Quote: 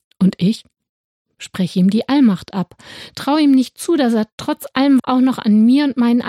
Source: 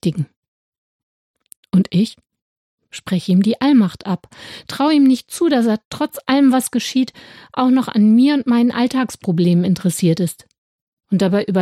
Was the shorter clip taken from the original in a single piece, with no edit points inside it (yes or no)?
no